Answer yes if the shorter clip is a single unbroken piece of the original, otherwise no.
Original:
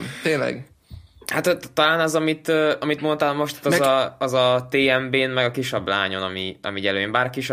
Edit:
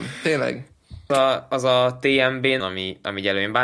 no